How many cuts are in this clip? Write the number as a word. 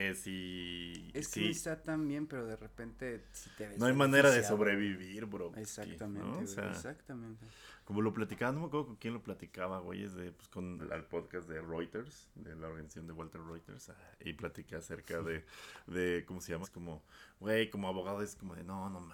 two